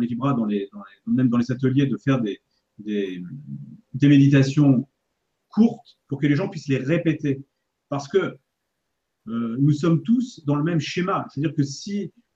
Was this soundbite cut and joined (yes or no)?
no